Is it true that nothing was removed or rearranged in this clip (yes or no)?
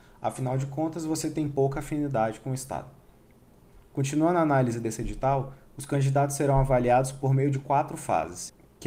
yes